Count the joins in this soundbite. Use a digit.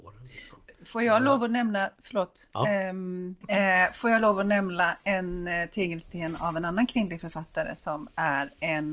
1